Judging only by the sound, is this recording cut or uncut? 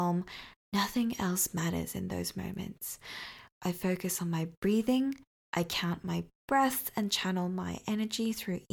uncut